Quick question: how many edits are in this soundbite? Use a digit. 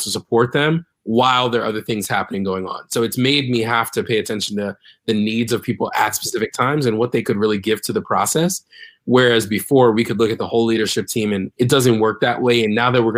1